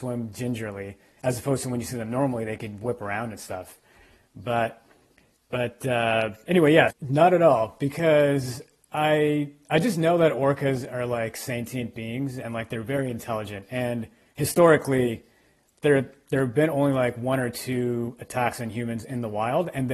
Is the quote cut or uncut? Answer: cut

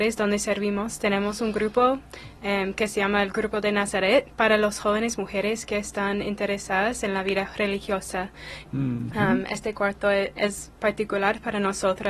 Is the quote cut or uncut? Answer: cut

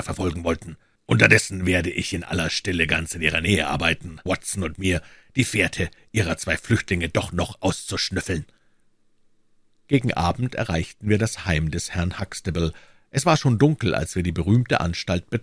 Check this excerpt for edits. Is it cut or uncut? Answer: cut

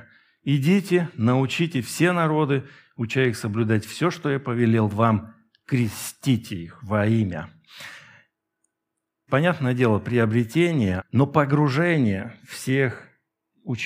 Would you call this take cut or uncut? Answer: cut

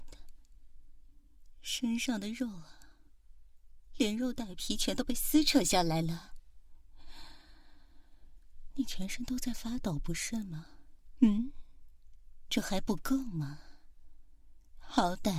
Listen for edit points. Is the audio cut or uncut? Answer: uncut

